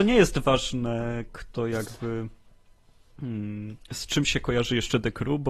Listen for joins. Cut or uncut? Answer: cut